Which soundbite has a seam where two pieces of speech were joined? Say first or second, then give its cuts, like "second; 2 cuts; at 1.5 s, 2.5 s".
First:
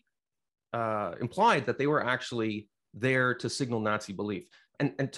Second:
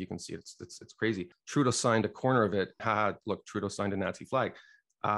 second; 2 cuts; at 1.3 s, 2.8 s